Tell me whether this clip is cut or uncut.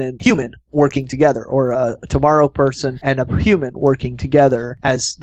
uncut